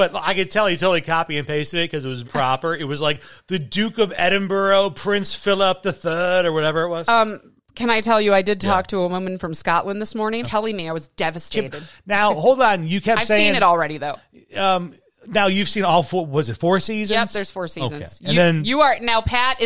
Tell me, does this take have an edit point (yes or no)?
yes